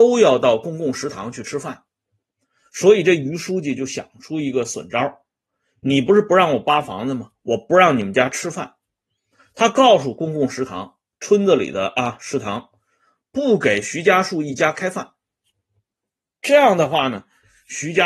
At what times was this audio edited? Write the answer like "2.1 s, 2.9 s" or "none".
none